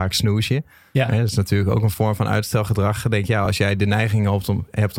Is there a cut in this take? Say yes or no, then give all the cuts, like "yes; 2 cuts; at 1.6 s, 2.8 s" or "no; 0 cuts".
no; 0 cuts